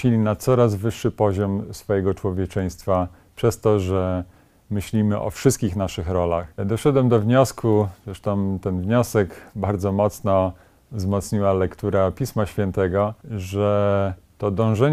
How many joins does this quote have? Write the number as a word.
two